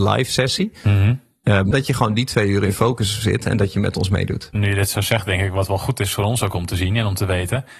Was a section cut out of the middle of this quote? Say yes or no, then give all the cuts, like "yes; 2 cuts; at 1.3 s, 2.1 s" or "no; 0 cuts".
yes; 2 cuts; at 1.7 s, 4.5 s